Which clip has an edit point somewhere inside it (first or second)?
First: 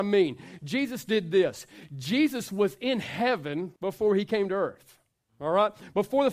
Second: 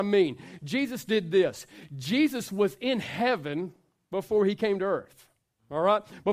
first